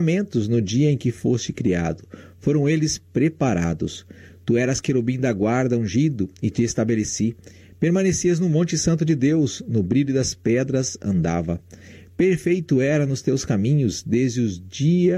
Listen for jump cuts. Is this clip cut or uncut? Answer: uncut